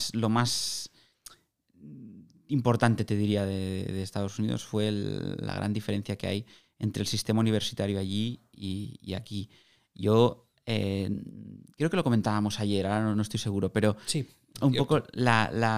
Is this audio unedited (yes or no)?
yes